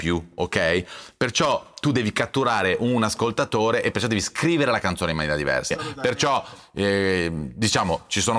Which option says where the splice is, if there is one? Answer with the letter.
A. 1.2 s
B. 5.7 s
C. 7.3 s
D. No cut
B